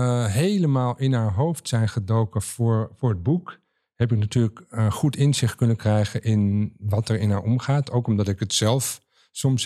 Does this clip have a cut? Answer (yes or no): no